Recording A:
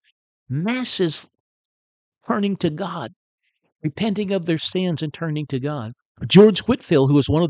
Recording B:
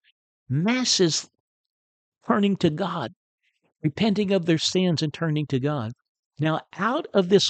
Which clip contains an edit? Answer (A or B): A